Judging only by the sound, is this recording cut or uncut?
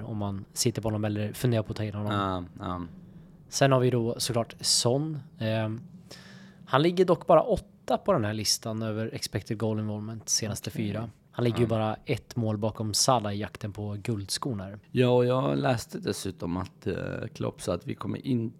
cut